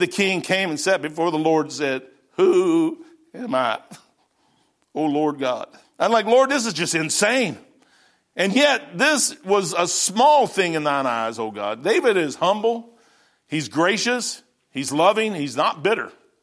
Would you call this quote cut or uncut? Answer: cut